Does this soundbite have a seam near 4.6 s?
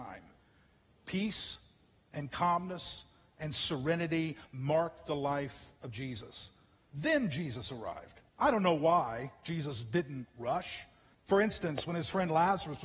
no; 3 cuts; at 6.9 s, 8.3 s, 11.1 s

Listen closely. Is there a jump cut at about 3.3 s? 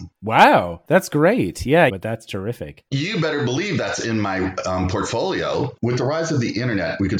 no; 2 cuts; at 1.9 s, 5.8 s

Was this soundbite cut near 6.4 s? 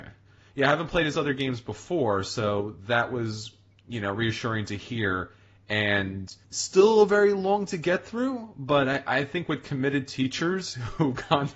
yes; 1 cut; at 6.4 s

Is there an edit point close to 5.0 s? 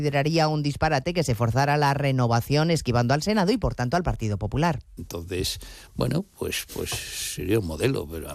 yes; 1 cut; at 5.0 s

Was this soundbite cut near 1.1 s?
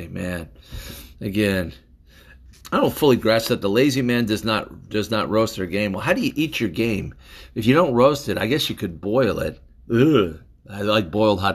yes; 1 cut; at 1.1 s

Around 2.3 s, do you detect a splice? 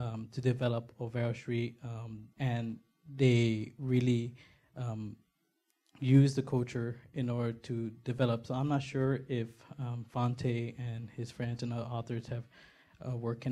yes; 1 cut; at 2.3 s

